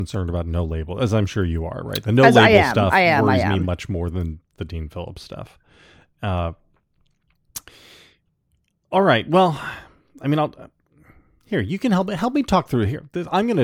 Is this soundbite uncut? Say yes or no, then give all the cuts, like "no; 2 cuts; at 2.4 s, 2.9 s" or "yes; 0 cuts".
no; 1 cut; at 4.5 s